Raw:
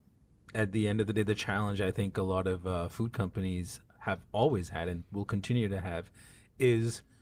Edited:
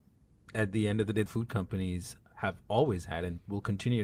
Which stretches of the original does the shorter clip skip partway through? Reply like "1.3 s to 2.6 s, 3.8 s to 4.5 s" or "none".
1.3 s to 2.9 s